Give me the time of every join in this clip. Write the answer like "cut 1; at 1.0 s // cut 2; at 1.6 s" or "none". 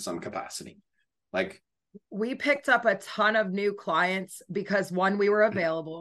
cut 1; at 1.2 s